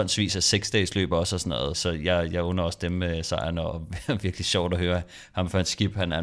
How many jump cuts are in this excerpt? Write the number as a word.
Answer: one